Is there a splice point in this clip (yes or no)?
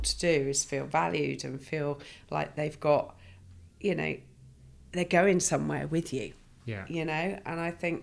no